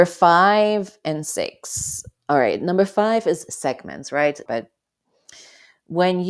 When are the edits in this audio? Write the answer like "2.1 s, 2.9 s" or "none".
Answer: 4.5 s